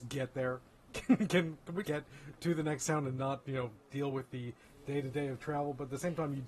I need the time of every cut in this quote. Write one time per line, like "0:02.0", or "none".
0:01.8